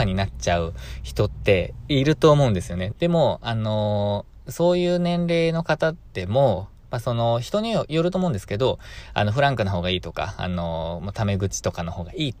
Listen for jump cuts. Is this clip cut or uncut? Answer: cut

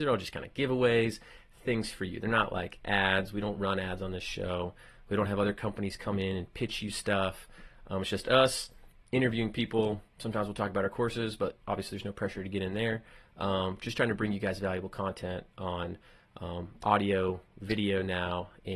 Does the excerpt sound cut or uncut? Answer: uncut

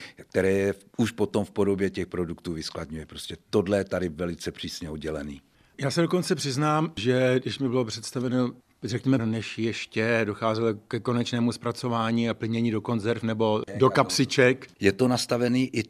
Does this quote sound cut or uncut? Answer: cut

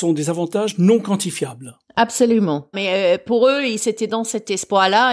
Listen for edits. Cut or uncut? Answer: cut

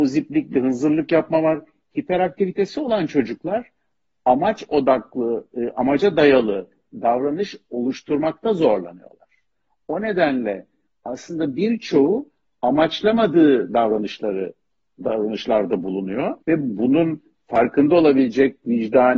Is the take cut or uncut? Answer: cut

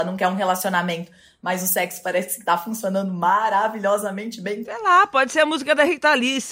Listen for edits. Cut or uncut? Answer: cut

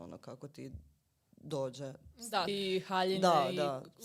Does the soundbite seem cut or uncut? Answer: cut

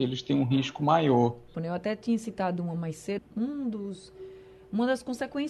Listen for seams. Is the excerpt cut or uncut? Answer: cut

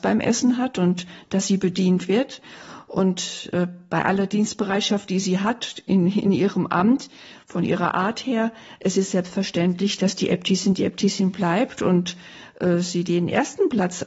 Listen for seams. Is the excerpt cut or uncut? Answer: uncut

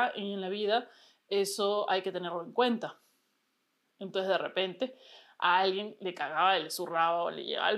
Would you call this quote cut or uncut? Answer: uncut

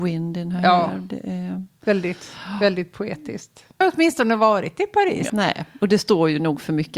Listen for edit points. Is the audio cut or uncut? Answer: cut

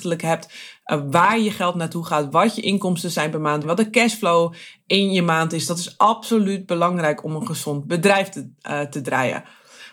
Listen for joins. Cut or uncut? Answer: cut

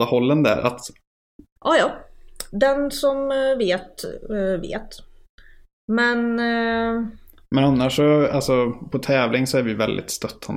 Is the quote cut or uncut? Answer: cut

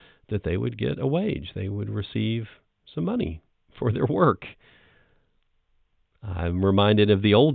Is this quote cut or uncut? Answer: uncut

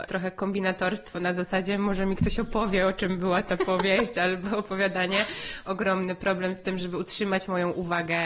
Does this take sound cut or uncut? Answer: cut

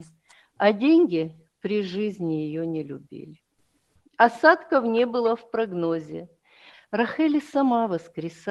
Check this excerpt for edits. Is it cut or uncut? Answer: cut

